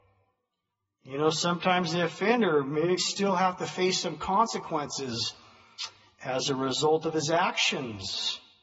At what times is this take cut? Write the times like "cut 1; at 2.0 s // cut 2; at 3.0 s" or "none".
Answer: cut 1; at 3.0 s